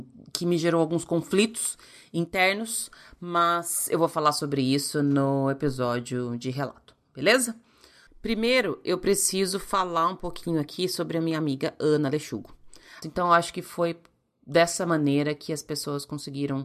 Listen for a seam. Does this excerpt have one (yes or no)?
yes